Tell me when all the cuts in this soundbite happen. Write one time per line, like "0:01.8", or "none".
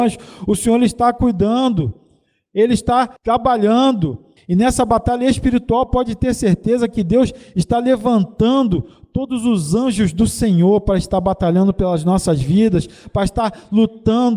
0:03.2
0:04.4